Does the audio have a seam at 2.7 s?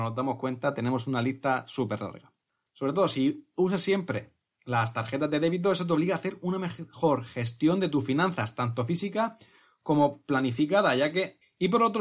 yes; 1 cut; at 2.7 s

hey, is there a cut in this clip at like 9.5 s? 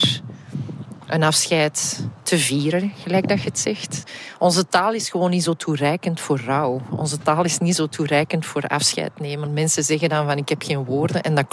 yes; 1 cut; at 9.5 s

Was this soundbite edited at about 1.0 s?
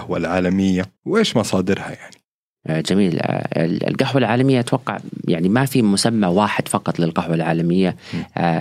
yes; 1 cut; at 1.0 s

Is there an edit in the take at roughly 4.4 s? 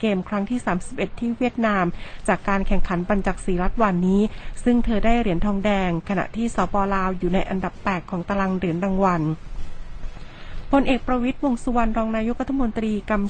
no; 1 cut; at 6.7 s

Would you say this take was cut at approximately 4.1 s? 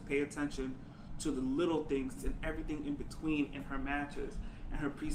no; 1 cut; at 2.2 s

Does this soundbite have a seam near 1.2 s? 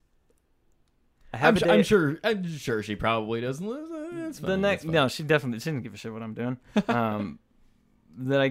no; 0 cuts

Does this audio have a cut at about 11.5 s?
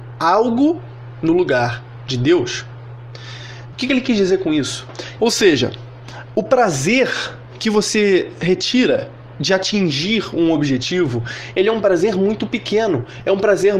no; 2 cuts; at 3.7 s, 5.2 s

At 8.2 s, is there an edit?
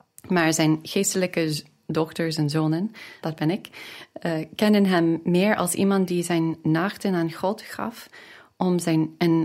no; 1 cut; at 3.2 s

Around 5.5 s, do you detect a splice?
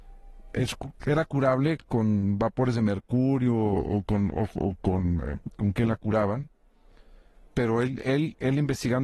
yes; 1 cut; at 5.5 s

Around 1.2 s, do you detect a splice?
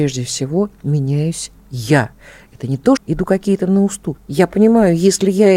no; 2 cuts; at 3.0 s, 4.2 s

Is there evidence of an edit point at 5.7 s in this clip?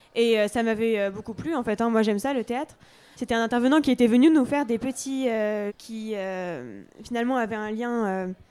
yes; 2 cuts; at 3.1 s, 5.7 s

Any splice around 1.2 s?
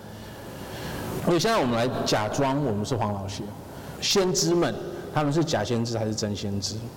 yes; 2 cuts; at 1.2 s, 4.0 s

